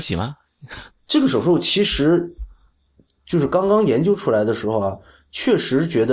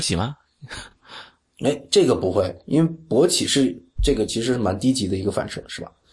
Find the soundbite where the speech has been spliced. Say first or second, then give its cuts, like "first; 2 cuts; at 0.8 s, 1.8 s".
first; 1 cut; at 0.9 s